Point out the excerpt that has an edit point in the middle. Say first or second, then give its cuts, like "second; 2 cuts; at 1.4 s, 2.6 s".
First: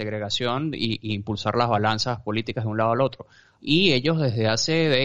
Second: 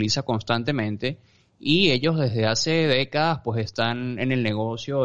first; 1 cut; at 3.6 s